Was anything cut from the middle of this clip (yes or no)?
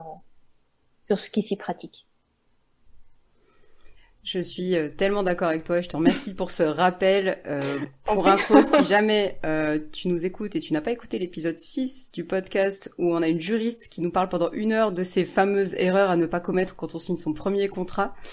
no